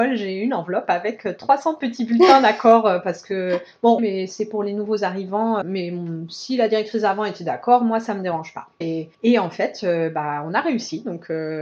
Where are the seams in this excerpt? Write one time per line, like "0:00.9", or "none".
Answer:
0:04.0
0:05.6
0:08.8